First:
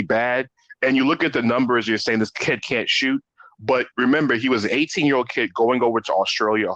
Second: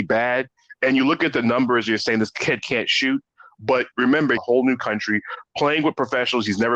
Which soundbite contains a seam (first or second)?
second